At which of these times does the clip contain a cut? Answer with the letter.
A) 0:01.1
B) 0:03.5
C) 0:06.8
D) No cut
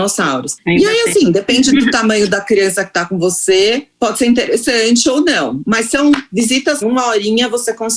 C